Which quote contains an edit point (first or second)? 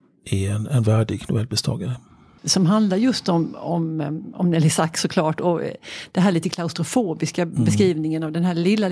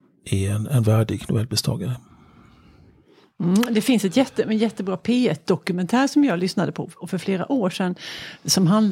first